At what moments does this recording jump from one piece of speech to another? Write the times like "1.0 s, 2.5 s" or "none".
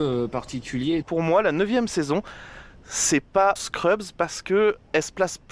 1.0 s, 3.6 s